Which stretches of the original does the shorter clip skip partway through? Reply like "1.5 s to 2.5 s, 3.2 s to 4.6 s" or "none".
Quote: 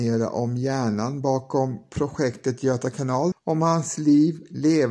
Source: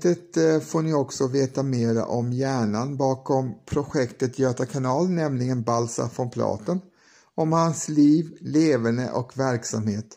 5.1 s to 7.2 s